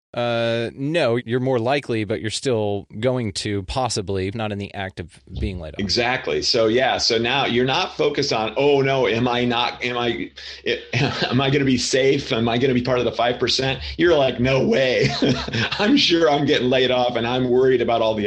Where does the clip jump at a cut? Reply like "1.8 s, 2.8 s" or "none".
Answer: 1.2 s, 4.3 s